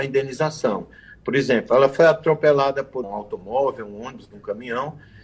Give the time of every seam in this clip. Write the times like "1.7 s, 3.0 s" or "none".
3.0 s